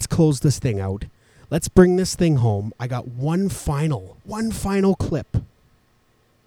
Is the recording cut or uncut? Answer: cut